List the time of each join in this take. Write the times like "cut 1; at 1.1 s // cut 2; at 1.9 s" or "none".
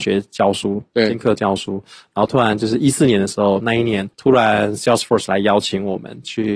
cut 1; at 4.1 s

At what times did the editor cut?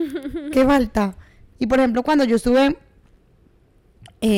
cut 1; at 1.5 s

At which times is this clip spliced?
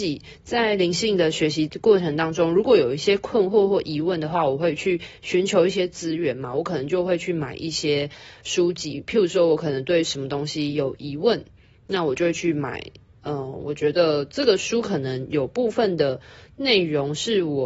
none

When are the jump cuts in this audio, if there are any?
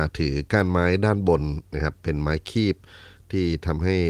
none

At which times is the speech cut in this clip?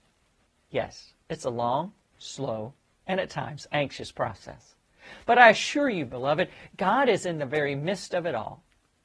none

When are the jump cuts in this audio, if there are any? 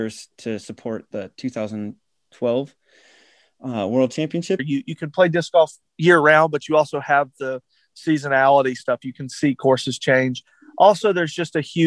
cut 1; at 4.6 s

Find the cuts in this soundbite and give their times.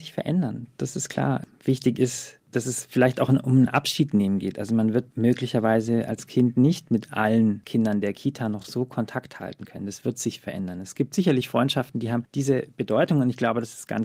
none

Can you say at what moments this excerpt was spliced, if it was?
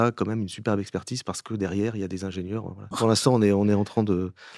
cut 1; at 2.9 s

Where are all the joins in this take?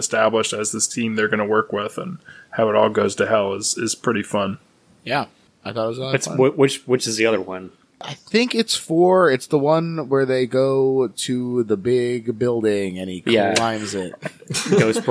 cut 1; at 5.5 s

